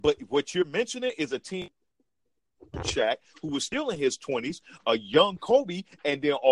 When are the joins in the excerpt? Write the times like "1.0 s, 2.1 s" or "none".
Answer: none